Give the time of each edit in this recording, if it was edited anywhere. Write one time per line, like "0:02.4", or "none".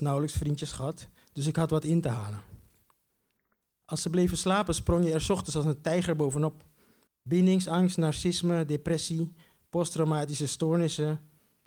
0:07.1